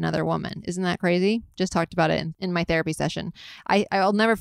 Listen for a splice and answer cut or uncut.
uncut